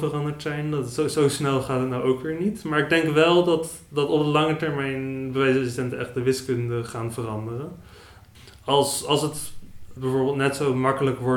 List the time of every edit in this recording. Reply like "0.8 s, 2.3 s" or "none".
none